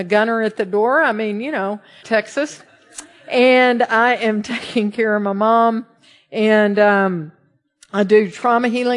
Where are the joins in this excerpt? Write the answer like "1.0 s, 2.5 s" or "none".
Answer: 2.0 s